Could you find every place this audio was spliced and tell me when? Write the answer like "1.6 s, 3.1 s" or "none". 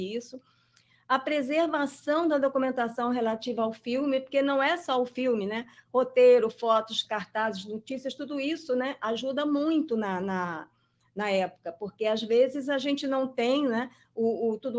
7.0 s